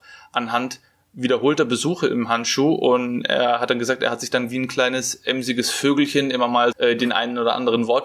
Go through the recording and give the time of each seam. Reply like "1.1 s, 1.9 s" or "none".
6.7 s